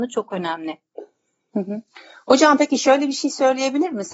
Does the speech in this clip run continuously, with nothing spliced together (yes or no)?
yes